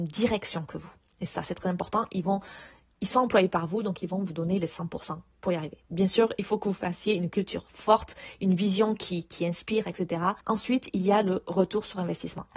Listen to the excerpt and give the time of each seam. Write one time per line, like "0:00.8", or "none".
0:10.4